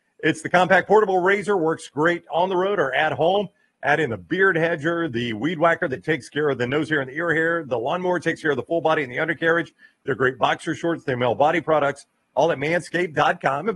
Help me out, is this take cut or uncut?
uncut